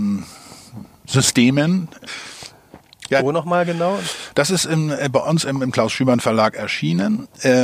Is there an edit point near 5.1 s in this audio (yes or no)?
no